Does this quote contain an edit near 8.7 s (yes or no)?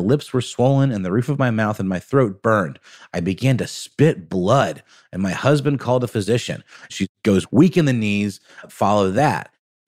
yes